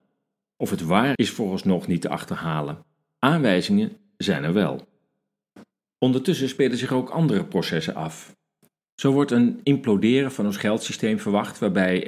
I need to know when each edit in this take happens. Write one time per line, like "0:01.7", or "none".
0:01.2